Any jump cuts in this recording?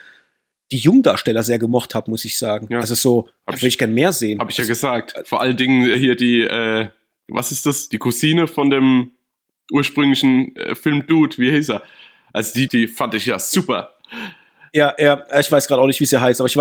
yes; 2 cuts; at 5.9 s, 12.7 s

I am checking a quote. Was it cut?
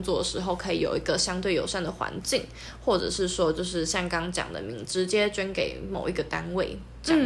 no; 0 cuts

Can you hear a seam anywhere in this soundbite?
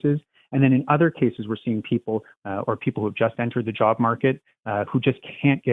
yes; 1 cut; at 2.4 s

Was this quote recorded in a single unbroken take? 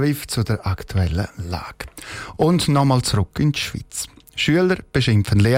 yes; 0 cuts

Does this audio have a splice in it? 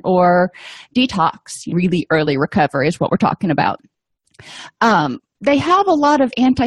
yes; 1 cut; at 1.7 s

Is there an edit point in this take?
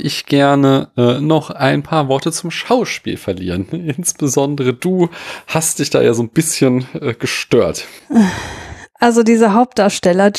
no; 0 cuts

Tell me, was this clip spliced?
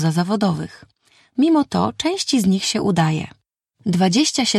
no; 0 cuts

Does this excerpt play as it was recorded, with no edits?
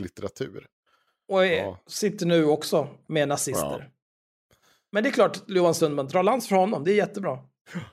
yes; 0 cuts

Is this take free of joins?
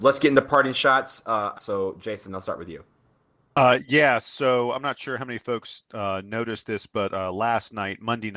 no; 1 cut; at 1.5 s

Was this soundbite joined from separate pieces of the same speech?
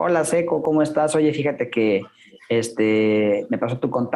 no; 0 cuts

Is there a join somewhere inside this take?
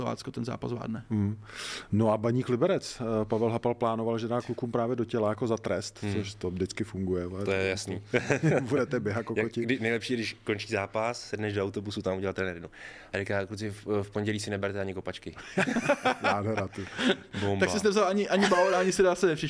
no; 0 cuts

